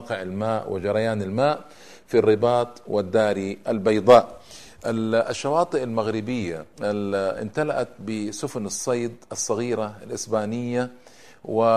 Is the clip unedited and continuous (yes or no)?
no